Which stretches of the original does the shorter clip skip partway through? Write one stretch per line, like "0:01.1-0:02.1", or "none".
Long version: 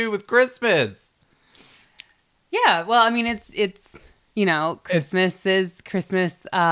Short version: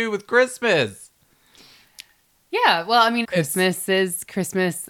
0:03.2-0:04.8